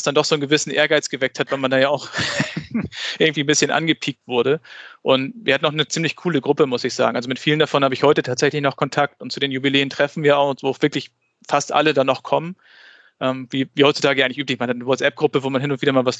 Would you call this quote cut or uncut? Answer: uncut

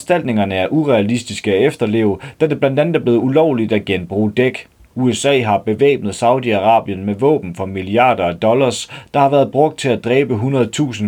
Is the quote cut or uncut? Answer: cut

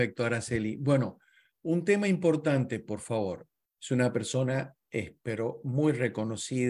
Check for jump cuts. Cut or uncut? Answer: cut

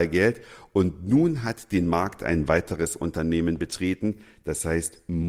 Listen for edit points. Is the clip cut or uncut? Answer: uncut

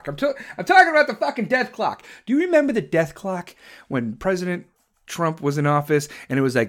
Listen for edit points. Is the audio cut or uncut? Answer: uncut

